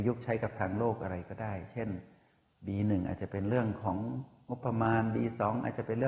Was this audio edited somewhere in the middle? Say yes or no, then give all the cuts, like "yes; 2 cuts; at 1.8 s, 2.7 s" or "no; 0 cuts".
no; 0 cuts